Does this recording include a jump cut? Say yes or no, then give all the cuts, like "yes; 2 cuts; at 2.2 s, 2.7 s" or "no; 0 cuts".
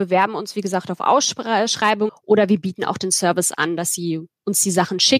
yes; 1 cut; at 2.1 s